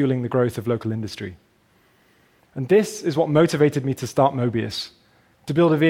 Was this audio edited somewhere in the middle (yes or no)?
yes